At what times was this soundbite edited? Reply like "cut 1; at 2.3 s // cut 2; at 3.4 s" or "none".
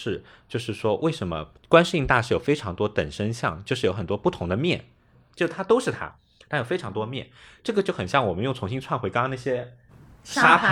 none